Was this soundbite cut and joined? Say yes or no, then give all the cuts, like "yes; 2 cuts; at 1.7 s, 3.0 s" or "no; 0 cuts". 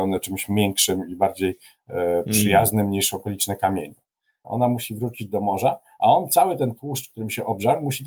yes; 1 cut; at 4.4 s